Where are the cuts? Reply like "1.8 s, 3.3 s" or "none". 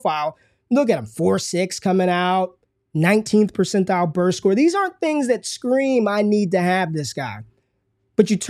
2.9 s